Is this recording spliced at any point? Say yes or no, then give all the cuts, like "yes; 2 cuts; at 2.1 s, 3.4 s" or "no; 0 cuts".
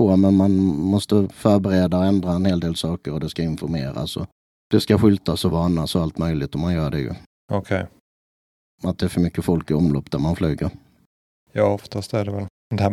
yes; 1 cut; at 8.6 s